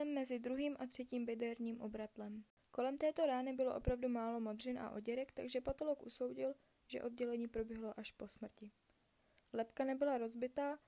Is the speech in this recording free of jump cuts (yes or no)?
yes